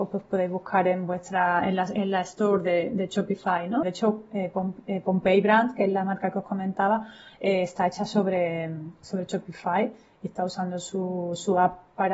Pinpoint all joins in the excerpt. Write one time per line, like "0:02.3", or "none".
0:03.8